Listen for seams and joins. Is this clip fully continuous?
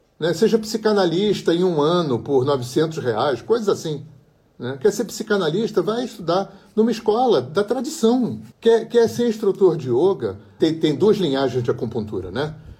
no; 2 cuts; at 8.5 s, 10.6 s

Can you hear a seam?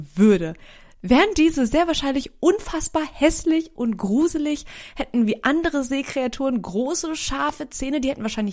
no; 0 cuts

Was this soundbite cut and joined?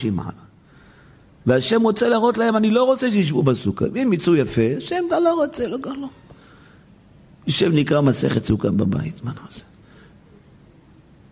no; 0 cuts

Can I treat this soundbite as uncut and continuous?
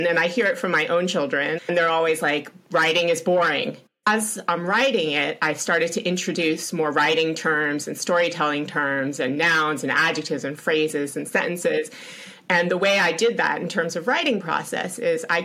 no; 2 cuts; at 1.6 s, 4.0 s

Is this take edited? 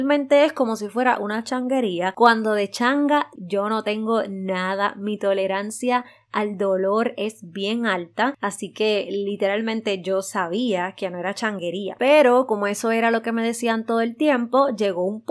yes; 1 cut; at 3.4 s

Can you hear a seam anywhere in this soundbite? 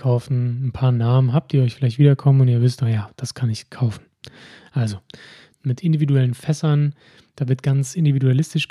yes; 1 cut; at 5.5 s

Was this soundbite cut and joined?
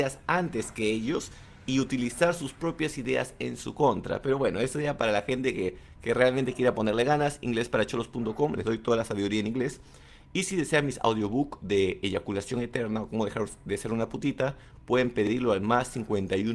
no; 0 cuts

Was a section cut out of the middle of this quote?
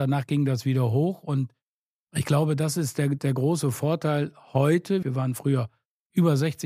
yes; 1 cut; at 5.0 s

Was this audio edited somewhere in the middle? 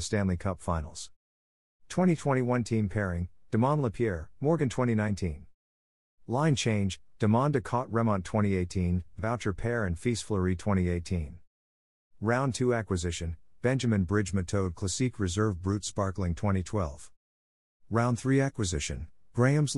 no; 0 cuts

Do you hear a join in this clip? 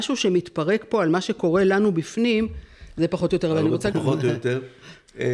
yes; 1 cut; at 3.9 s

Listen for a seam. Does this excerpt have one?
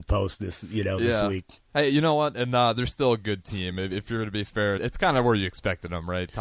yes; 1 cut; at 4.8 s

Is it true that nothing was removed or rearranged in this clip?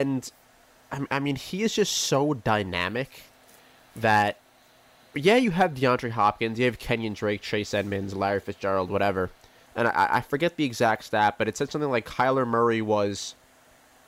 no; 1 cut; at 9.7 s

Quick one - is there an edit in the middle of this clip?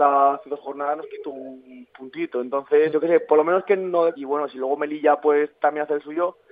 yes; 2 cuts; at 2.9 s, 4.2 s

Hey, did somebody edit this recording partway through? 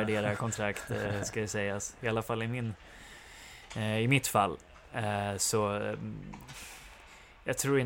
no; 0 cuts

